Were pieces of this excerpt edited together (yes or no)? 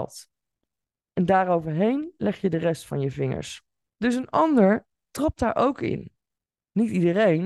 yes